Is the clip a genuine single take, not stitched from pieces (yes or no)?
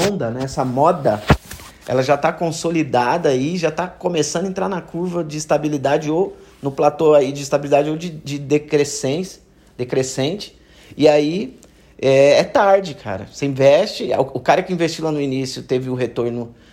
yes